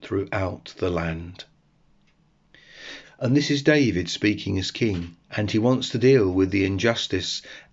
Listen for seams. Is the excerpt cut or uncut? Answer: cut